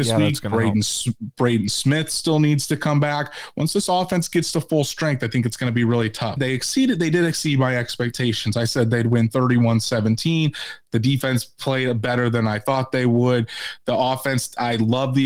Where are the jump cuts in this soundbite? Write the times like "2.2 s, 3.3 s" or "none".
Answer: 6.4 s